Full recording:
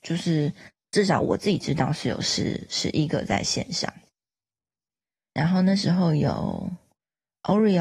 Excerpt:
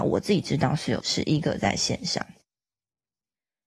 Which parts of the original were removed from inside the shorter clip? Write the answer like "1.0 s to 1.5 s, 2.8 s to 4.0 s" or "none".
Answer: 2.2 s to 2.7 s